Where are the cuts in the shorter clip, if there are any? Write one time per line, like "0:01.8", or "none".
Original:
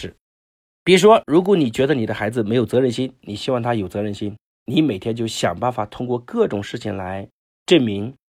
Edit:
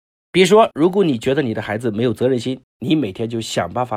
0:02.6